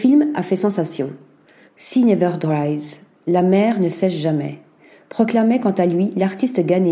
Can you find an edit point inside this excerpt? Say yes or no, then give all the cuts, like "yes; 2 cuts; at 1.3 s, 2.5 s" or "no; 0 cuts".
yes; 1 cut; at 1.7 s